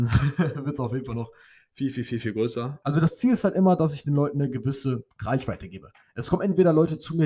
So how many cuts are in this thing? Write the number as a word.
two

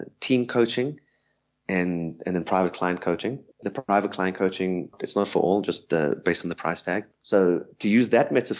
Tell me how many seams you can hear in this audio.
two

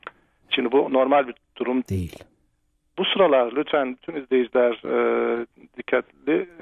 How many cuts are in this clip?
one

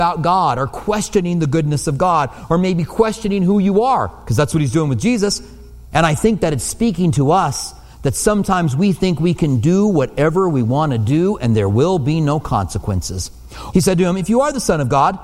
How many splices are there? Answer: two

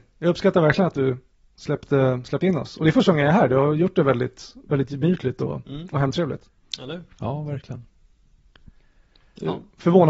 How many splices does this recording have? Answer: zero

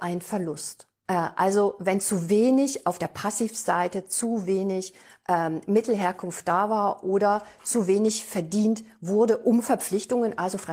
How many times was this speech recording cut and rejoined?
zero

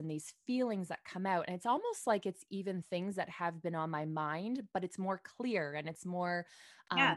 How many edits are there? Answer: zero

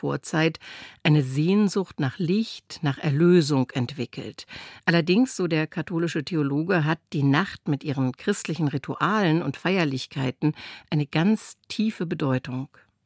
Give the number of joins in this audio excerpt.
zero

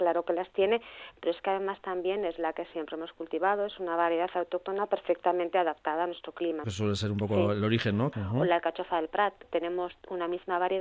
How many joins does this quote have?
three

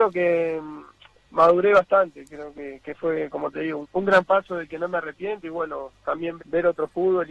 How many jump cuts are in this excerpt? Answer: two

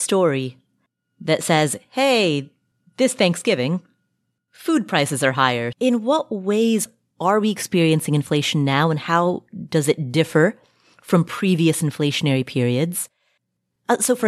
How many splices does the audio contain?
one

